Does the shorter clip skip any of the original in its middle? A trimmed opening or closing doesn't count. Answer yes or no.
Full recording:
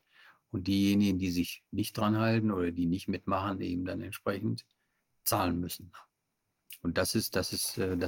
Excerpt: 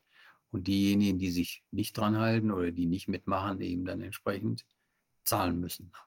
no